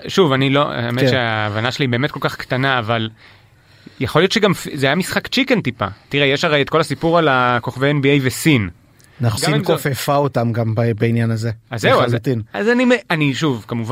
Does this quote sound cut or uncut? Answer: cut